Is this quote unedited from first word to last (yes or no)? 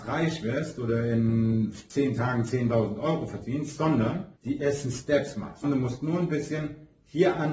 no